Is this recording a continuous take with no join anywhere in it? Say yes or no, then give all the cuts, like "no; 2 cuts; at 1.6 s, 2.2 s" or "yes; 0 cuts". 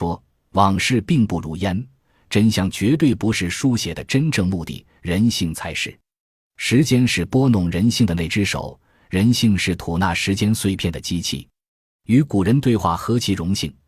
yes; 0 cuts